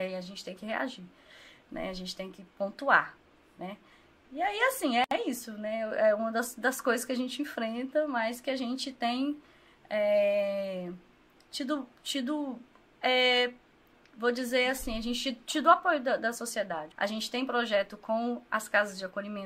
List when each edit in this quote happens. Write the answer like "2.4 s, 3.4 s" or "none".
16.9 s